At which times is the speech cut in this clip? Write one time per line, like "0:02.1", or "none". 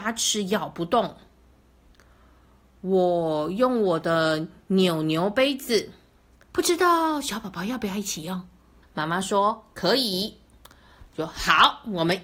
0:08.8